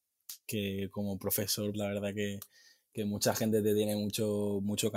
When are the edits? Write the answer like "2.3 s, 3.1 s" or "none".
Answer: 1.7 s